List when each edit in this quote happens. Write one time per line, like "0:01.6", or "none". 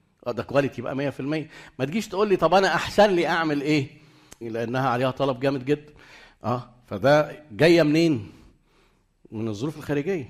0:04.4